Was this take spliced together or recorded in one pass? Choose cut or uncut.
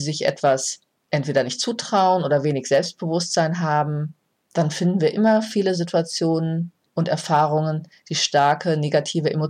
uncut